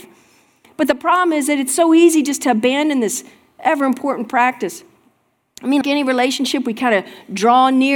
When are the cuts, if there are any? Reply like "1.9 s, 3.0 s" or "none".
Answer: 5.8 s